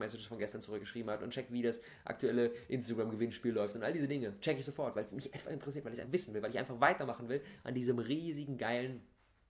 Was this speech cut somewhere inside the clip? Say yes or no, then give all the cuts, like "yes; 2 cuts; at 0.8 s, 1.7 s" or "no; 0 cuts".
yes; 1 cut; at 6.1 s